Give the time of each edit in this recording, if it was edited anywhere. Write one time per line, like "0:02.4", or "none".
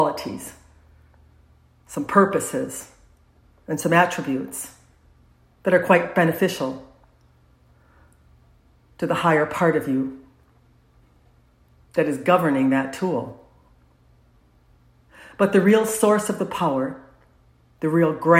none